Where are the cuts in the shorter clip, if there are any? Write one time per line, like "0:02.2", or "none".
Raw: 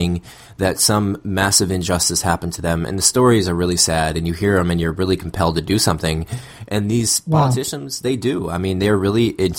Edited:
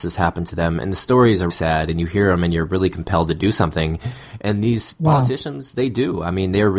0:01.5

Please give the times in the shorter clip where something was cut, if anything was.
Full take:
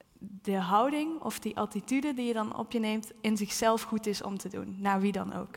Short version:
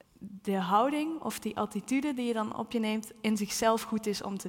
none

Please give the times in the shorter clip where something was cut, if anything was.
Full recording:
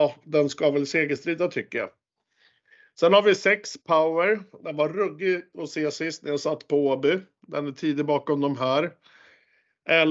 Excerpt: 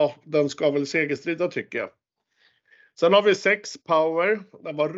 none

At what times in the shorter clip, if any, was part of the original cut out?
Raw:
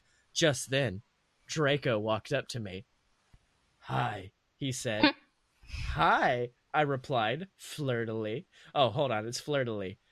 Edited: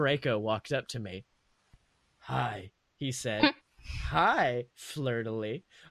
0:03.6
0:04.7

